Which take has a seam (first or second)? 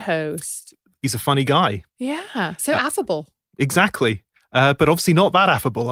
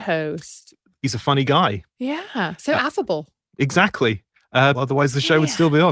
second